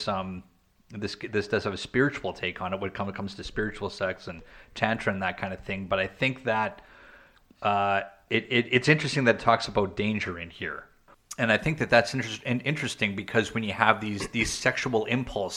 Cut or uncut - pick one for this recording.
uncut